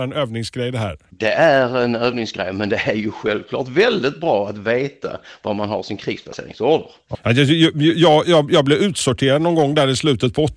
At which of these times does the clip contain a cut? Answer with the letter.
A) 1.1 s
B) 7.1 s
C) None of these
B